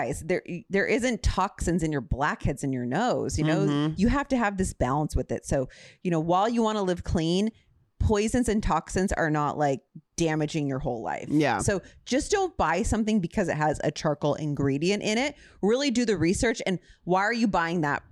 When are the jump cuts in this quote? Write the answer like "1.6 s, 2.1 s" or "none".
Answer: 4.0 s

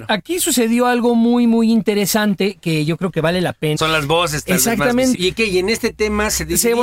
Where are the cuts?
3.8 s, 5.1 s

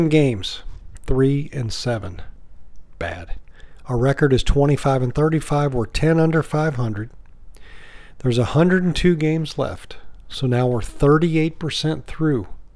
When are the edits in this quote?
none

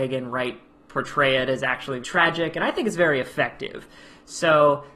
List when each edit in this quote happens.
2.0 s

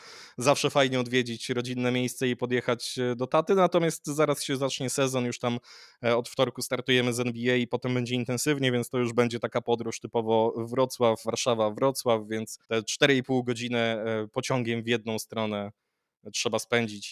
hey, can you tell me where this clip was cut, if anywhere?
11.2 s, 12.6 s

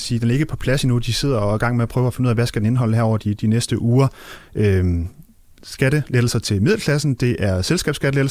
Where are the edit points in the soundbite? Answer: 4.4 s

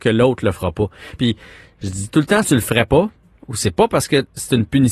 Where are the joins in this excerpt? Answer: 1.2 s, 2.4 s

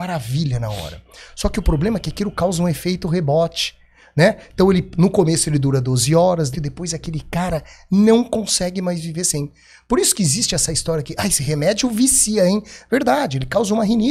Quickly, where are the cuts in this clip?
6.5 s

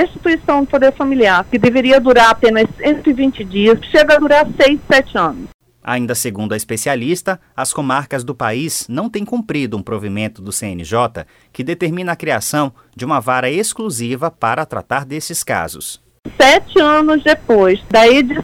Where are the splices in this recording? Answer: 3.8 s

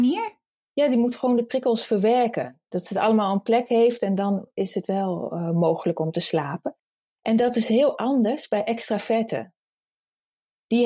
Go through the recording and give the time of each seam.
none

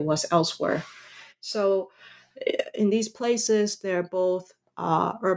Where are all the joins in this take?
none

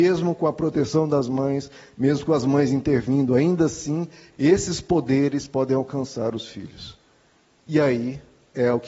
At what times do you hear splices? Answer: none

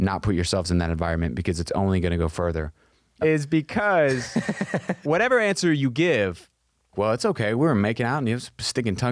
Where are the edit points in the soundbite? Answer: 3.2 s, 6.9 s

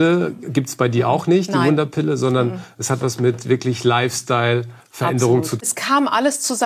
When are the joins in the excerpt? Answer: 5.6 s

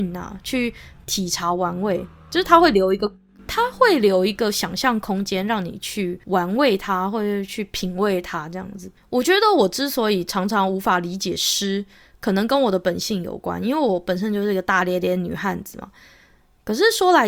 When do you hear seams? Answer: none

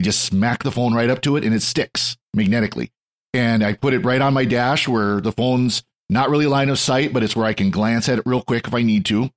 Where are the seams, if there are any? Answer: 2.3 s

